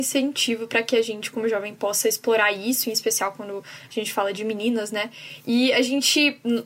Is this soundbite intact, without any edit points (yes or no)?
yes